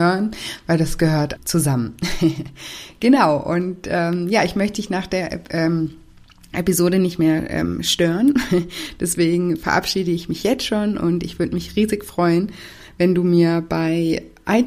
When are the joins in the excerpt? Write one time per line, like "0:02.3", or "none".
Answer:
0:01.4